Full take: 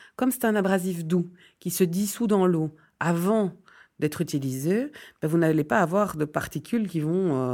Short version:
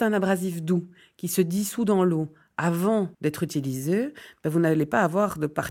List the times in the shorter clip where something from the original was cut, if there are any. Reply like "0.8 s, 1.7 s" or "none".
3.1 s